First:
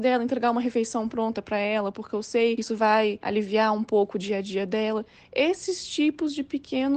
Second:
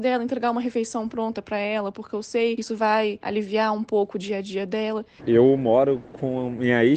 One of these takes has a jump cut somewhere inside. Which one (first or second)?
second